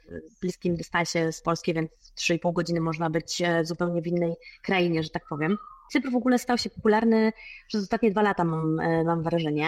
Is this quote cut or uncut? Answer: uncut